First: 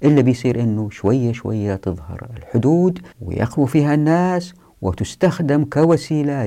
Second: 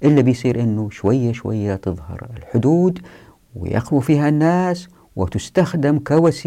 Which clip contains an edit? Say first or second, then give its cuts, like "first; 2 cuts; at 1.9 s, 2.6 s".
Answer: first; 1 cut; at 3.1 s